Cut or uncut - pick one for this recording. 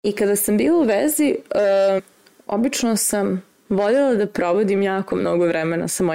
cut